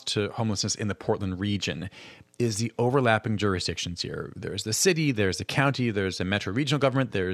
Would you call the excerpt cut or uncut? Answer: uncut